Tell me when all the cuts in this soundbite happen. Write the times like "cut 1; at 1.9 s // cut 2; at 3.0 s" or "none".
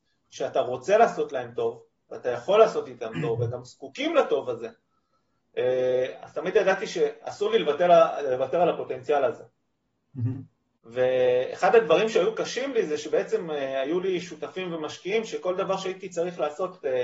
none